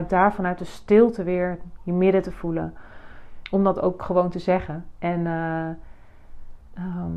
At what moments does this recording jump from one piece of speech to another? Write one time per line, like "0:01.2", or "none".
0:03.4